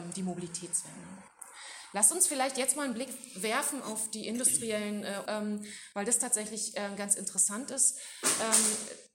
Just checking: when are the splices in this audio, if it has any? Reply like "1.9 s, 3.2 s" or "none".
5.3 s